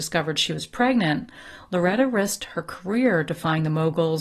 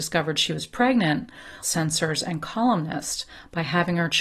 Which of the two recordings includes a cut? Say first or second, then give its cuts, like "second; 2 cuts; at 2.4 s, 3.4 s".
second; 1 cut; at 1.6 s